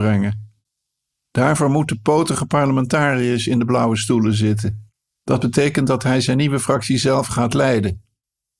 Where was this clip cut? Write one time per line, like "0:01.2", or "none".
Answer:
0:05.1